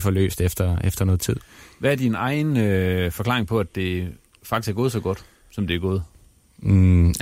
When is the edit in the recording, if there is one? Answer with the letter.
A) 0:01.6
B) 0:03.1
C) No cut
C